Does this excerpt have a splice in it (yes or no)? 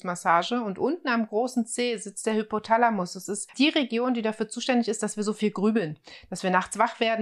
no